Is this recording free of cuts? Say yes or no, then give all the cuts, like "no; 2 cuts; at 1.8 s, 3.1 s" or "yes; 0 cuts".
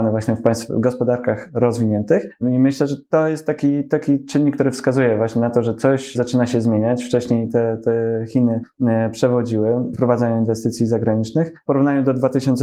yes; 0 cuts